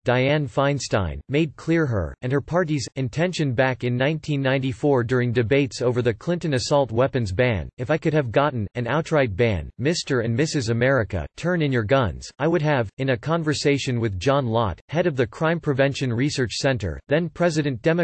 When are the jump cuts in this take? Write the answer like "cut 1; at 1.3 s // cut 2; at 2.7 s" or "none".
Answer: none